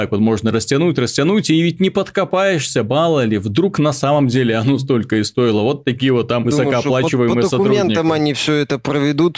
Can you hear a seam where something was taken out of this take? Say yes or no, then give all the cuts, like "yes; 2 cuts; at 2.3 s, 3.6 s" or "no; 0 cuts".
yes; 1 cut; at 6.4 s